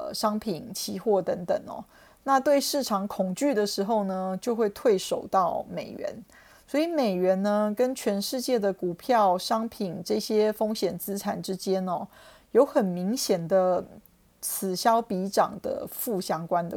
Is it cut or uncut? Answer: uncut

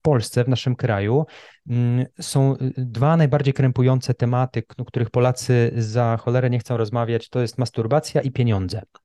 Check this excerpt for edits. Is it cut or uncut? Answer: uncut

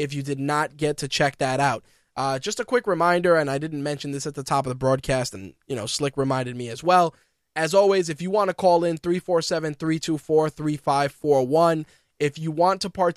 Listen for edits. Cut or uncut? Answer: uncut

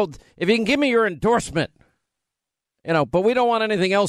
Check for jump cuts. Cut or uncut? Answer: uncut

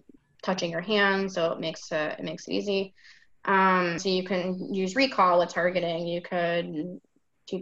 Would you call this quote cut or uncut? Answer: cut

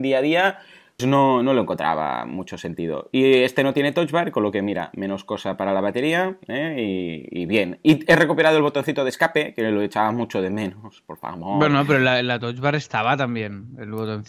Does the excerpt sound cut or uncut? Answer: cut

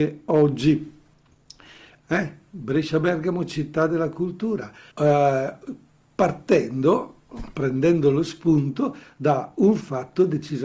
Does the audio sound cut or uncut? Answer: cut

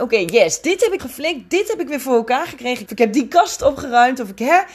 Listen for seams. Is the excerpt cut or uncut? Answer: cut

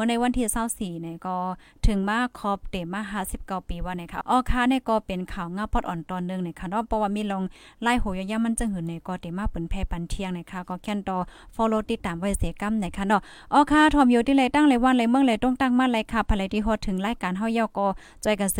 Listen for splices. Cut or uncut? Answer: cut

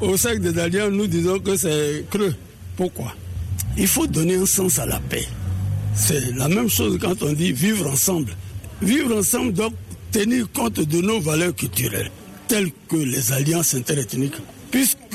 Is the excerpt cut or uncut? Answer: uncut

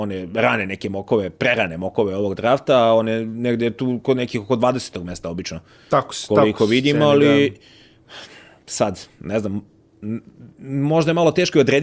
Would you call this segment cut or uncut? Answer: uncut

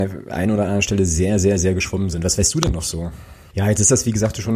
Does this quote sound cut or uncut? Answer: cut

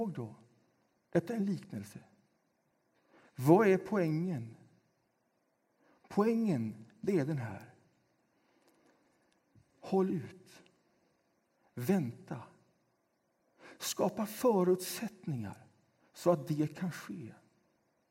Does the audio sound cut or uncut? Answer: uncut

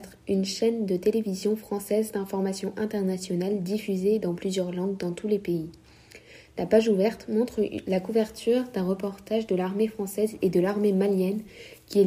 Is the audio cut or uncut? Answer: uncut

